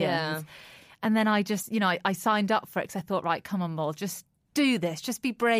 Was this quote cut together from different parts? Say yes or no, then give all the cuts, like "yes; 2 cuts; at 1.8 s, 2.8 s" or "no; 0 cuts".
no; 0 cuts